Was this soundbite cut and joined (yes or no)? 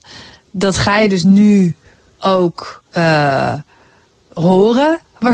yes